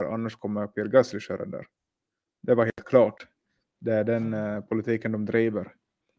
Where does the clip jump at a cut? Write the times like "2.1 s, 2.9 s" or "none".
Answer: none